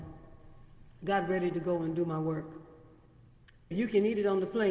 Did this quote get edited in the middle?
yes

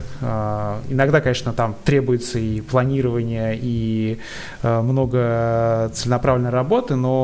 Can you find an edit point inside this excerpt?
no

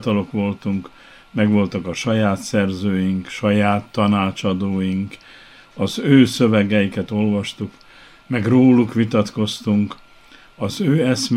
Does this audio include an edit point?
no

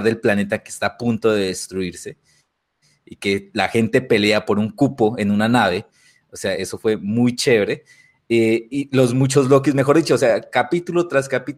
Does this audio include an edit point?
no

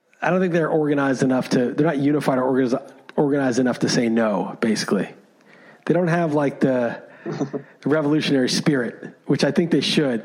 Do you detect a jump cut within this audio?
no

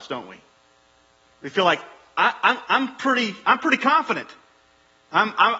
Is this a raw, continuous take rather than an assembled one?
yes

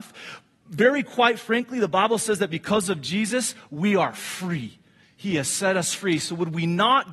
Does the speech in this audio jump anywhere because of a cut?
no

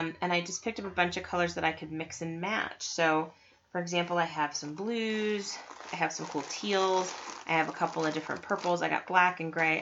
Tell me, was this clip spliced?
no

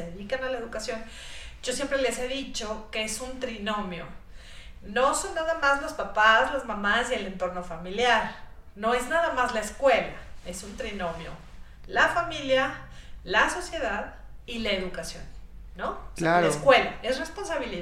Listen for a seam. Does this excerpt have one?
no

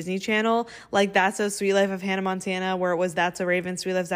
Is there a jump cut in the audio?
no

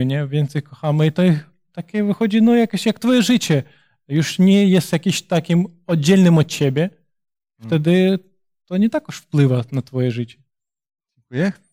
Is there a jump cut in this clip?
no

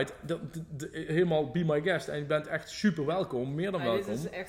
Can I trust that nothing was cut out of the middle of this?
yes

